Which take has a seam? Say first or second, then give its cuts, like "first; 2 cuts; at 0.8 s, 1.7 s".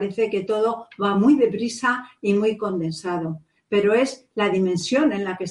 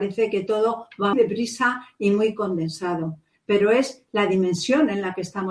second; 1 cut; at 1.1 s